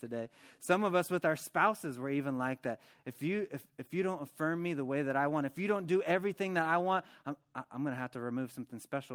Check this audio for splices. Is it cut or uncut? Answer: uncut